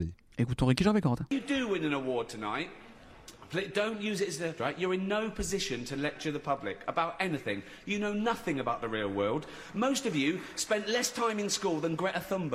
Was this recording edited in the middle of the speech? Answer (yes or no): yes